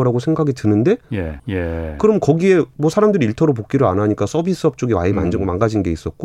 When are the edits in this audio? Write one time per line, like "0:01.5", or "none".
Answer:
0:01.4